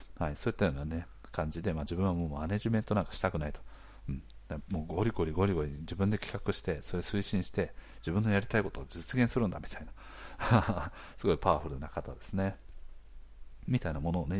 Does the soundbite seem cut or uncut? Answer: uncut